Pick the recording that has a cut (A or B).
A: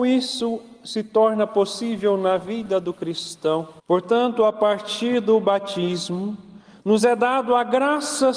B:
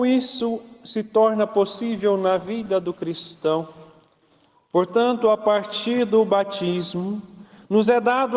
A